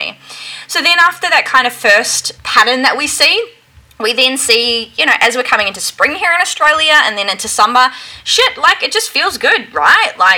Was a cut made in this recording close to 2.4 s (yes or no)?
yes